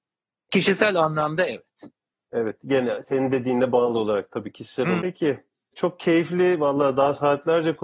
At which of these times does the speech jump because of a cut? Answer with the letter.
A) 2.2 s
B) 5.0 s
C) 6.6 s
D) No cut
B